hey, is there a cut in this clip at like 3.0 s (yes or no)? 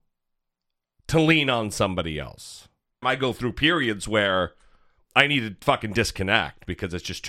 yes